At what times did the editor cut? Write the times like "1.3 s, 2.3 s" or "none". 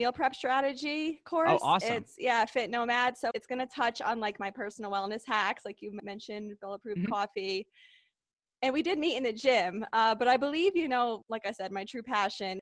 3.3 s

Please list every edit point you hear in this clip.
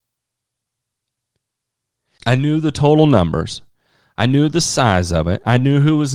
2.2 s

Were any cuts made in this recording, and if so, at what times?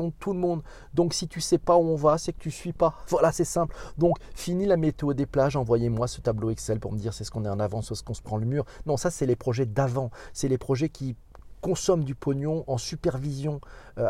none

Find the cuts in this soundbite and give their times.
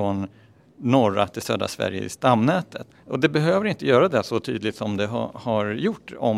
2.9 s

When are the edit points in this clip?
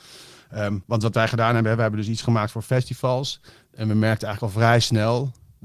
none

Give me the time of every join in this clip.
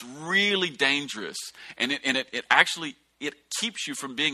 none

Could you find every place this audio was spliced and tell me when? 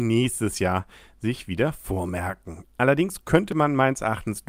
2.6 s

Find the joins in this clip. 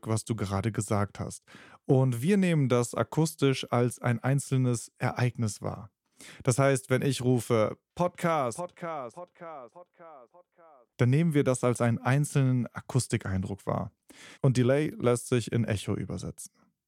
10.9 s, 14.3 s

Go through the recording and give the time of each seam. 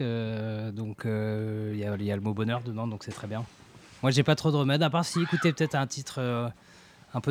none

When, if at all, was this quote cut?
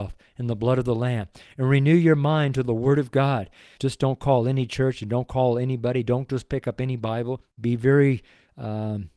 3.8 s, 7.5 s

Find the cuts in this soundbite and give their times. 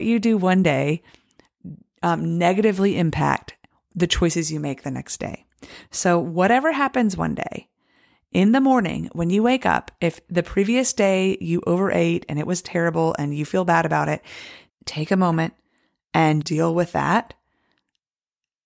14.7 s, 16.4 s

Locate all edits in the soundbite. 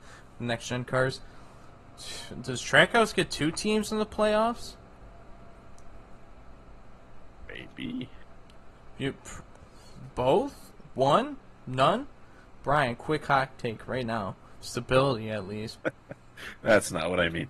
14.6 s, 15.8 s

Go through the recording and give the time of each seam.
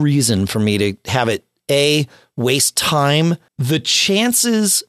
3.5 s

